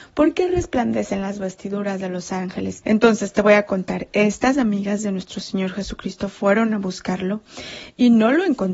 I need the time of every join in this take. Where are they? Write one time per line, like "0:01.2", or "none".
0:02.8